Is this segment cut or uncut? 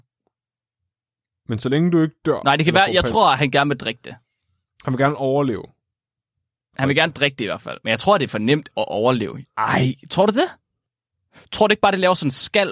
cut